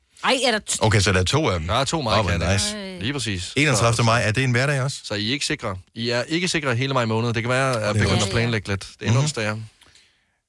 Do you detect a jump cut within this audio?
no; 0 cuts

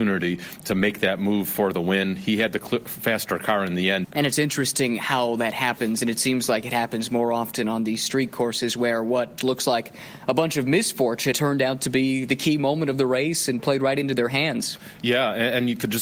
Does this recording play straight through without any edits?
no; 3 cuts; at 4.0 s, 9.4 s, 11.3 s

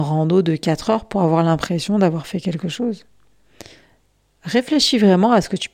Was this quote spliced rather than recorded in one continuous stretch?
no; 0 cuts

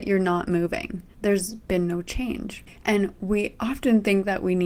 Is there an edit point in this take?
yes; 1 cut; at 1.1 s

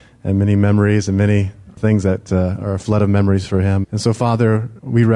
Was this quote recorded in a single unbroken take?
no; 1 cut; at 3.8 s

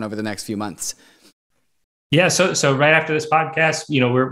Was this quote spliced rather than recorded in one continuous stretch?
no; 0 cuts

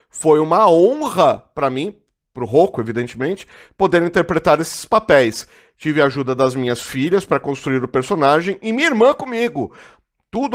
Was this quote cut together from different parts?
no; 0 cuts

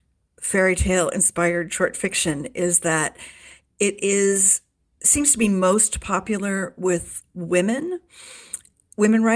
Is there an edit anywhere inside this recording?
no; 0 cuts

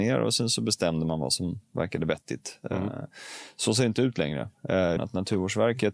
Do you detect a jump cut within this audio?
yes; 1 cut; at 5.0 s

